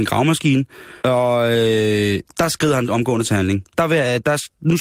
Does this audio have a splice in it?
yes; 2 cuts; at 1.0 s, 3.7 s

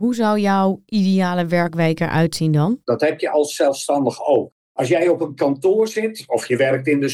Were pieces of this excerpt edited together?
yes; 1 cut; at 2.8 s

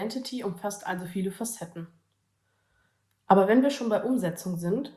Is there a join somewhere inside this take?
no; 0 cuts

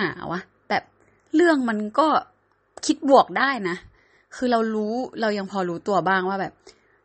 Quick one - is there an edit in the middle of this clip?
no; 0 cuts

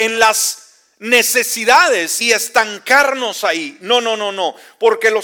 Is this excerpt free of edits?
no; 1 cut; at 2.2 s

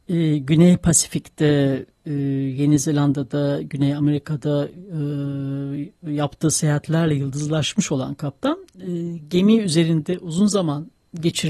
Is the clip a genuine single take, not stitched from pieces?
yes; 0 cuts

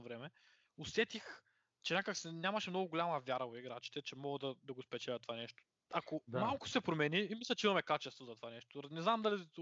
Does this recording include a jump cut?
no; 0 cuts

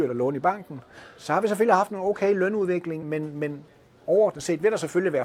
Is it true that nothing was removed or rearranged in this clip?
no; 1 cut; at 3.0 s

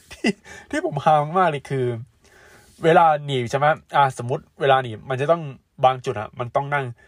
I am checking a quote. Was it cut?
no; 0 cuts

